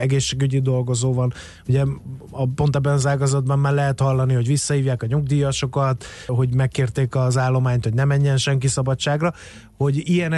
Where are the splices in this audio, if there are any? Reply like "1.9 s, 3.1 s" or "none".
6.3 s